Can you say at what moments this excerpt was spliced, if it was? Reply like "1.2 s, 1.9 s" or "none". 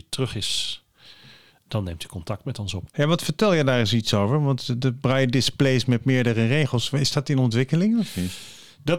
2.9 s